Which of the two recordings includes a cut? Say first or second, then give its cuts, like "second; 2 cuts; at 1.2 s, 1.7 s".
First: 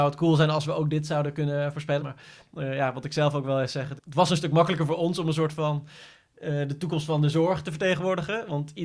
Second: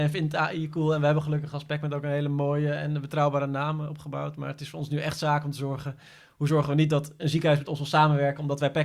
first; 2 cuts; at 2.0 s, 4.0 s